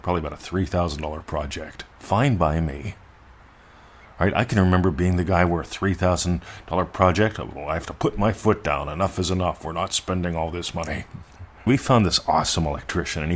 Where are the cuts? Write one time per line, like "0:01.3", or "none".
0:01.9
0:11.7